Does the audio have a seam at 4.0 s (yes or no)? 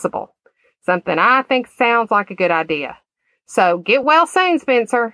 no